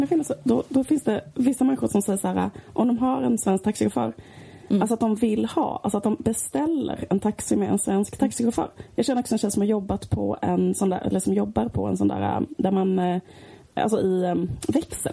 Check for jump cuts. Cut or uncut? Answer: uncut